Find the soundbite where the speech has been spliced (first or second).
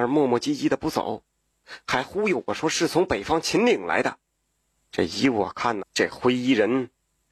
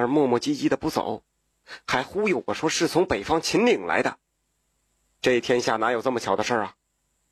first